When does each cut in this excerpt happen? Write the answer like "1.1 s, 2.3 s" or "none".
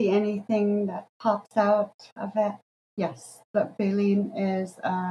2.9 s